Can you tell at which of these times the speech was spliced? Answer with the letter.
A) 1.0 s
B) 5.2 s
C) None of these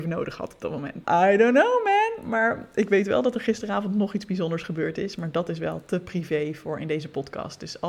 A